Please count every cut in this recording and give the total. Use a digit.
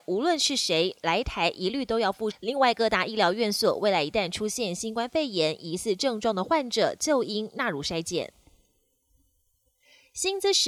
1